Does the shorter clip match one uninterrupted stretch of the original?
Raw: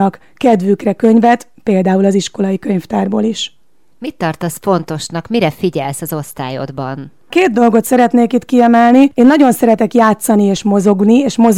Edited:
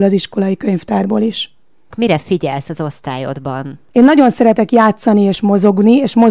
no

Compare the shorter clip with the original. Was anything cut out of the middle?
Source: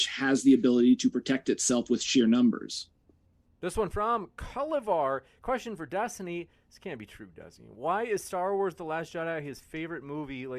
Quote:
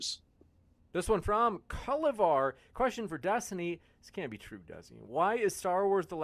no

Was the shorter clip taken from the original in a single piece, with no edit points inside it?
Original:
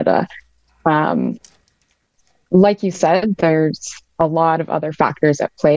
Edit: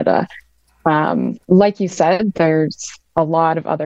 no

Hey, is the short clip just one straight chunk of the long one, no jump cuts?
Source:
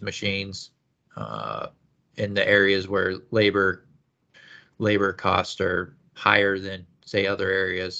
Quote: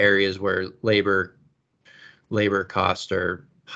yes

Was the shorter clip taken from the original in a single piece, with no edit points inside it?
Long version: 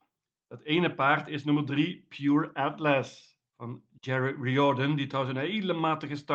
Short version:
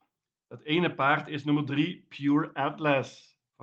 yes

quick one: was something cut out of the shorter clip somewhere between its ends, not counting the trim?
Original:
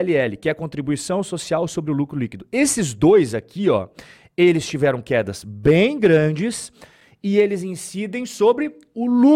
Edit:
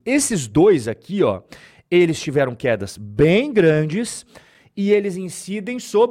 no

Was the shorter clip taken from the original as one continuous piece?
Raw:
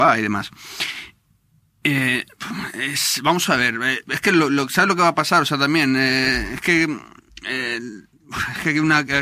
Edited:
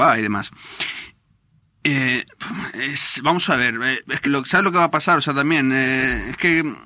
no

